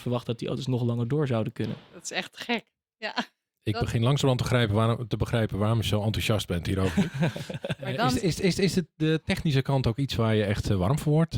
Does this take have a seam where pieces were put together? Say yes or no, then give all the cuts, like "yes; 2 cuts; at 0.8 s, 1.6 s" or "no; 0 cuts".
no; 0 cuts